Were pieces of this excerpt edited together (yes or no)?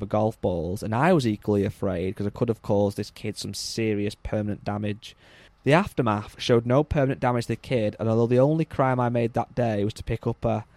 yes